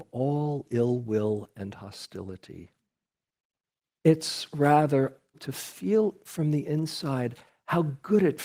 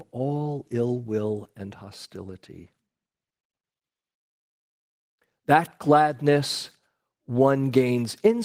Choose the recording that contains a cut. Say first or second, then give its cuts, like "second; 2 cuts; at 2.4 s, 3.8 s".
first; 2 cuts; at 4.0 s, 5.3 s